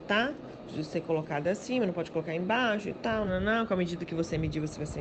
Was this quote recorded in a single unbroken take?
no; 1 cut; at 3.3 s

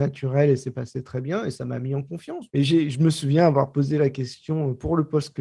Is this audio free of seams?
no; 1 cut; at 2.5 s

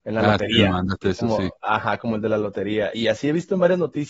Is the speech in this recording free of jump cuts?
yes; 0 cuts

